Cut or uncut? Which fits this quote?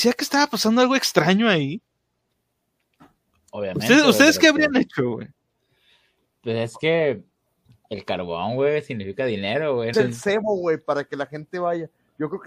cut